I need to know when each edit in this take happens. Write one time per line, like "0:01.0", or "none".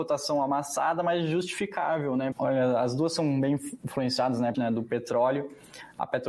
0:02.3
0:04.5

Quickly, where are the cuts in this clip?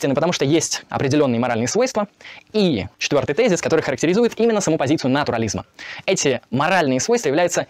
0:02.9

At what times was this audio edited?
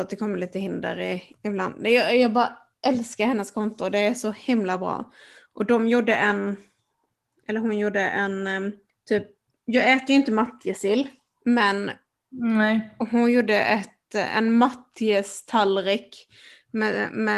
none

